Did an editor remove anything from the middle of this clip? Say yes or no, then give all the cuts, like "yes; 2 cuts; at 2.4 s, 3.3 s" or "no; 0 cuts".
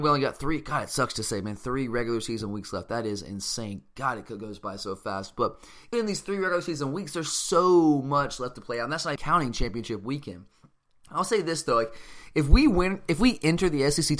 yes; 2 cuts; at 5.9 s, 9.2 s